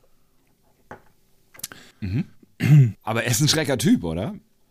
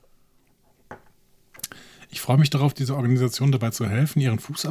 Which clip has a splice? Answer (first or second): first